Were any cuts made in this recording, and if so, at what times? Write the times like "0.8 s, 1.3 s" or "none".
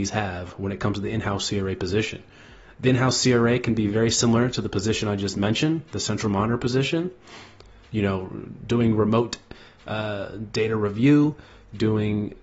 none